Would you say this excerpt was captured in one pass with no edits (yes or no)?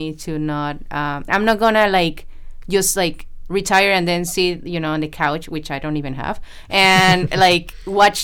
no